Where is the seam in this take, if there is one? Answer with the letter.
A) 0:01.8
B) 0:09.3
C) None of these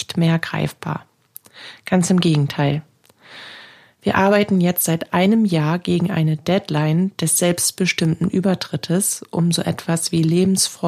C